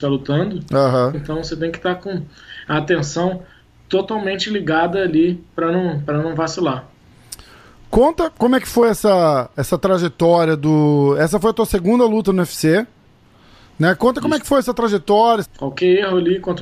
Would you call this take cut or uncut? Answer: cut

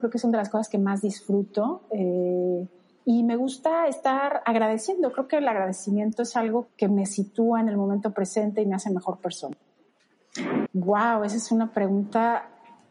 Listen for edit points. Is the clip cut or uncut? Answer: cut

